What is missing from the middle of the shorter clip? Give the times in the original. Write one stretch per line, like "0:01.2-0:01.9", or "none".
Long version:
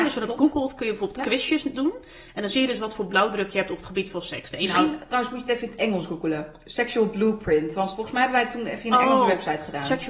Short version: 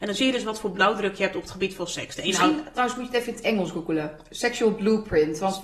none